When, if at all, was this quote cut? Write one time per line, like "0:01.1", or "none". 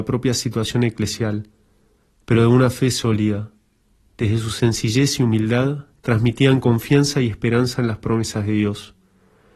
none